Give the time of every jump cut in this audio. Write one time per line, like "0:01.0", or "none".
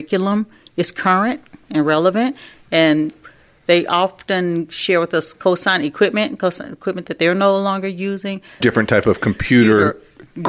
0:08.6